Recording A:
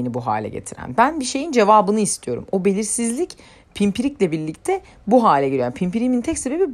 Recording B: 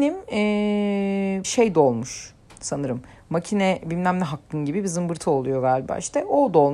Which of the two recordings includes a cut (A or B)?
B